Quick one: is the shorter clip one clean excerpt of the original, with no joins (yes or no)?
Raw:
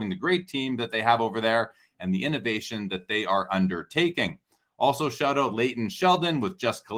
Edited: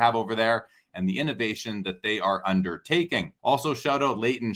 no